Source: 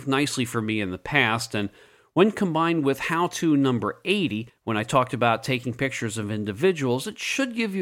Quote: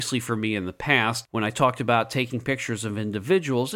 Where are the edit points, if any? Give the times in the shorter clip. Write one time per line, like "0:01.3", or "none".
0:01.2